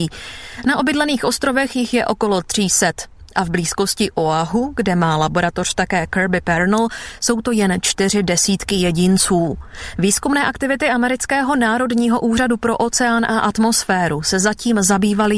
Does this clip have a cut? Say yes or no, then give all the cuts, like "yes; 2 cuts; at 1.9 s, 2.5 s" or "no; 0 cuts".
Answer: no; 0 cuts